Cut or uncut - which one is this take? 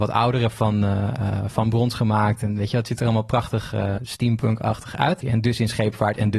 cut